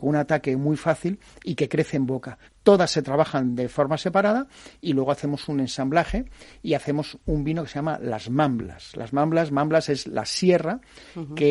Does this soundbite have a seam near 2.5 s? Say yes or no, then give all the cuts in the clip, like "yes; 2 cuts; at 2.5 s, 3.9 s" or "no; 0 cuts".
yes; 1 cut; at 2.5 s